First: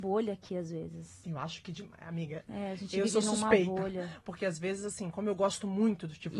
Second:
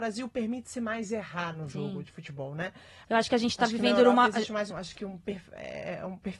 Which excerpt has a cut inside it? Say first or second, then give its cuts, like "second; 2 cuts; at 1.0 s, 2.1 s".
second; 2 cuts; at 3.0 s, 4.7 s